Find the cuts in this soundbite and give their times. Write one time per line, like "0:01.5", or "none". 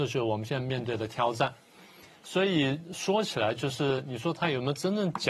none